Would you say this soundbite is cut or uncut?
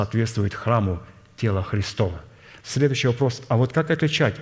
cut